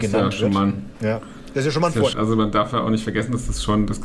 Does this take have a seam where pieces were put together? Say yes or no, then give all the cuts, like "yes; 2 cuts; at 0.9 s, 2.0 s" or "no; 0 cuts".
yes; 1 cut; at 2.1 s